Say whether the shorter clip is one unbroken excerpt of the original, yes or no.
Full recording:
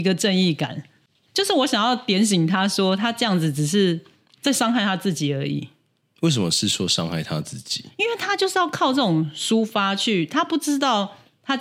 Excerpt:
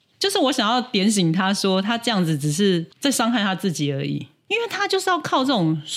no